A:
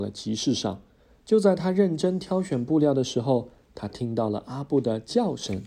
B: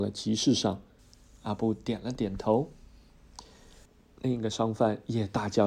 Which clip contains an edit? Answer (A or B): B